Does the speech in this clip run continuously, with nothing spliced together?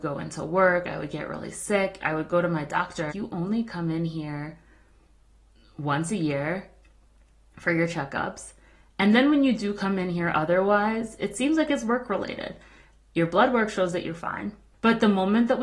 no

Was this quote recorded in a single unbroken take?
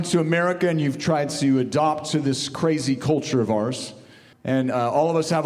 no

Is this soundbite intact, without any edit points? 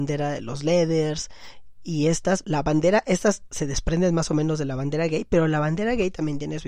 no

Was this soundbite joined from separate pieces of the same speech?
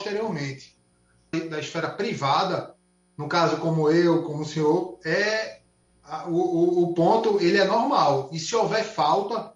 yes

